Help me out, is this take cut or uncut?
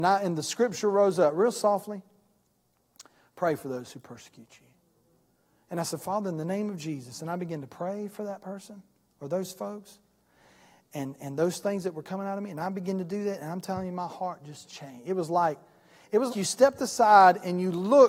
cut